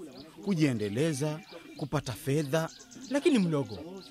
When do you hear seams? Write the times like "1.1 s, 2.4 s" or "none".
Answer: 1.8 s